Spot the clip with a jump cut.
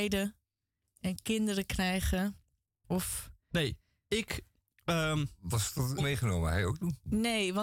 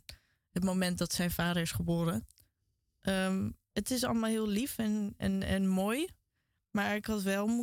first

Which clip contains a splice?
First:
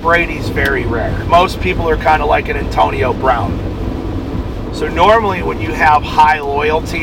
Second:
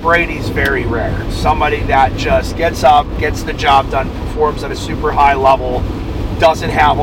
first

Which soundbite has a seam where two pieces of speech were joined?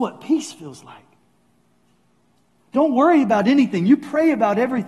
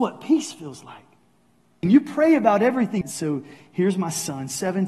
second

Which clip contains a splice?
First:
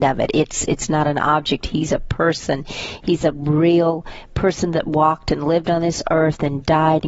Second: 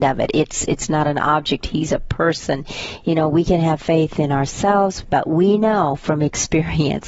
second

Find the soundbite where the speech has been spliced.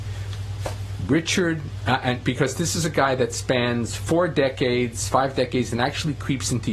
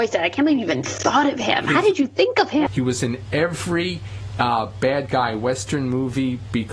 second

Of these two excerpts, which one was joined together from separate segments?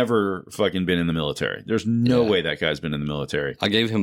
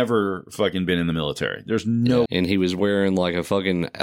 second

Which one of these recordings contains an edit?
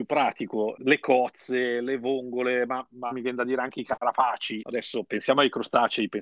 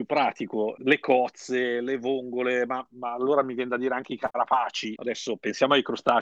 first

